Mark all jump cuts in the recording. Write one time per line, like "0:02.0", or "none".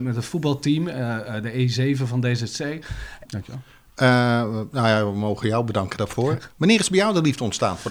0:03.3
0:06.5